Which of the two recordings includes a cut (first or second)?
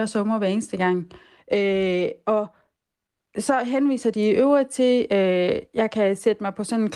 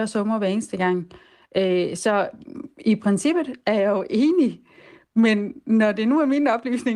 first